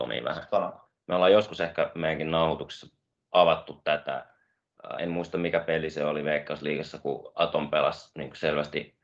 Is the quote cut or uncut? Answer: uncut